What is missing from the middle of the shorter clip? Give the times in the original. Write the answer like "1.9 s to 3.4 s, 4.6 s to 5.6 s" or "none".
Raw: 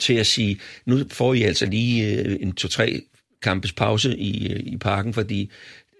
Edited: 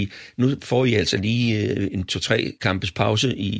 3.0 s to 3.4 s